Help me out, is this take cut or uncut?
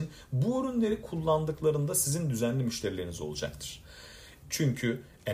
cut